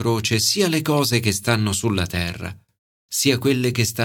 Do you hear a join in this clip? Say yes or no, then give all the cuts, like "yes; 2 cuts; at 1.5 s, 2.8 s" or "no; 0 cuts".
no; 0 cuts